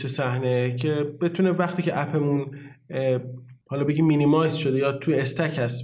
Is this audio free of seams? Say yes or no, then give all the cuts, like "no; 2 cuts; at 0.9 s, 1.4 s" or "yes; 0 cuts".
no; 1 cut; at 3.6 s